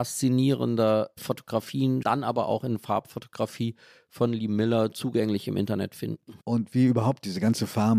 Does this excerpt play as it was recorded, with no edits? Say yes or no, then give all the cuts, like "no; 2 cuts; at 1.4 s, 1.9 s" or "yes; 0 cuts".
no; 2 cuts; at 2.0 s, 6.4 s